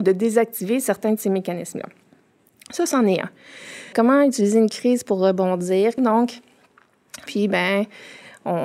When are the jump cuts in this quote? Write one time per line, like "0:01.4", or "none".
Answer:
0:03.9
0:06.0
0:07.3